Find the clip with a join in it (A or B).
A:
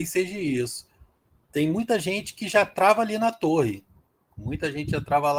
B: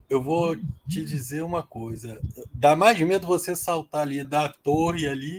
B